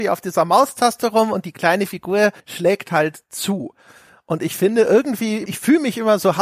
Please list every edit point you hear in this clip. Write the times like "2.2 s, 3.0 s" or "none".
2.4 s, 5.5 s